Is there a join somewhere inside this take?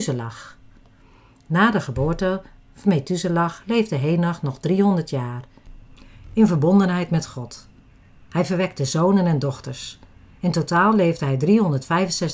no; 0 cuts

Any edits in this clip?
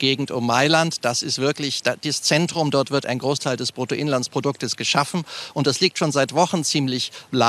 no; 0 cuts

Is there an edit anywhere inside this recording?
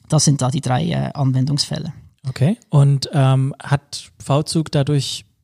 no; 0 cuts

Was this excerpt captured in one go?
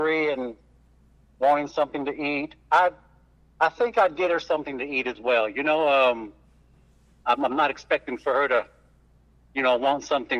yes; 0 cuts

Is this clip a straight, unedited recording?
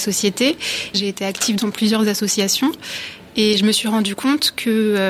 no; 1 cut; at 0.9 s

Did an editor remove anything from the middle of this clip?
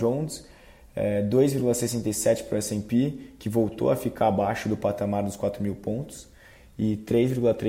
no; 0 cuts

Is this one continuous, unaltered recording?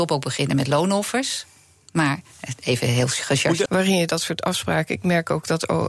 no; 1 cut; at 3.7 s

